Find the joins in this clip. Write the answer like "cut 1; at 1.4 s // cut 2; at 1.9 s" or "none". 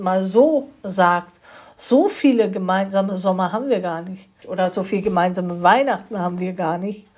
cut 1; at 4.4 s